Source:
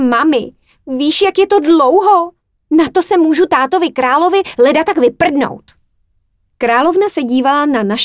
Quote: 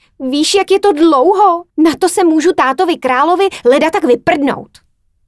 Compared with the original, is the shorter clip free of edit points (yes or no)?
no